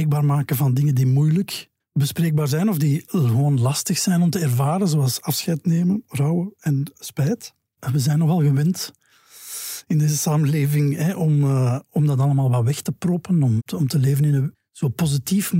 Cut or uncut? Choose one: cut